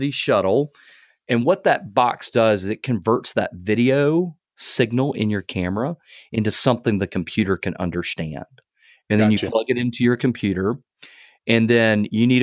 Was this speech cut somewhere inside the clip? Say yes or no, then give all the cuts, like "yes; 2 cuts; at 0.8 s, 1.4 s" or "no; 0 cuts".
no; 0 cuts